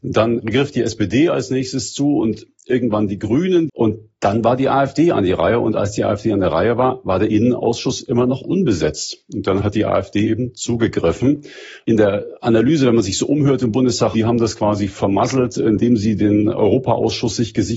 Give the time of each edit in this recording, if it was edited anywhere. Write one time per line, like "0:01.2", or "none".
0:03.7
0:14.1

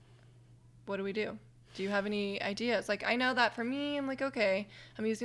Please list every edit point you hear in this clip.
none

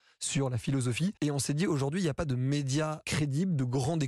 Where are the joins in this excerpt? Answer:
0:01.2
0:03.0

